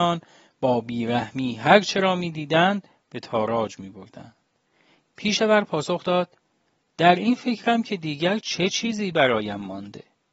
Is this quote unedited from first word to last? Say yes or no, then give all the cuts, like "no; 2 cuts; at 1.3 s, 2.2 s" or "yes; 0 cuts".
no; 1 cut; at 5.1 s